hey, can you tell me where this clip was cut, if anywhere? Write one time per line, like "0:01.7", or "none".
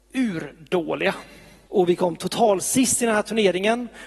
0:01.7